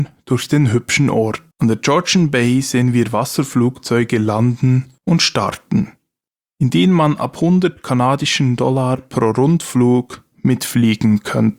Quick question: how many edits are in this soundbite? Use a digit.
2